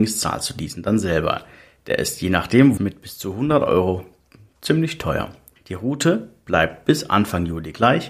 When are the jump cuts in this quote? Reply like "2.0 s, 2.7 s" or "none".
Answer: 2.8 s, 5.6 s